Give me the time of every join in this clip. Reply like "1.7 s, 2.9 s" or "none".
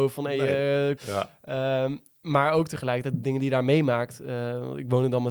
1.0 s